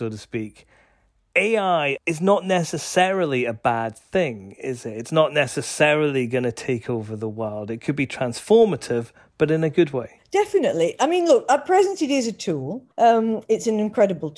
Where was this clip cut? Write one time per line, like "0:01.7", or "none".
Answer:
0:12.9